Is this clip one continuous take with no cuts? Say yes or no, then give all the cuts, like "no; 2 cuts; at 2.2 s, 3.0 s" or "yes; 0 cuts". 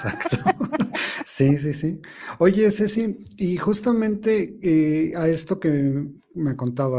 yes; 0 cuts